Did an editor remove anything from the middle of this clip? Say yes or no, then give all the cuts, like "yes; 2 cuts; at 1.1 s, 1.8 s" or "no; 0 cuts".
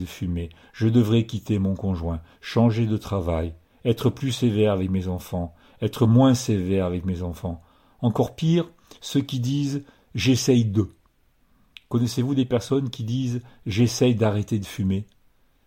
no; 0 cuts